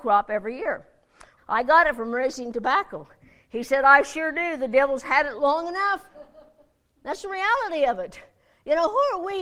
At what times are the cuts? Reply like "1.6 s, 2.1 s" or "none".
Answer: 1.4 s, 6.1 s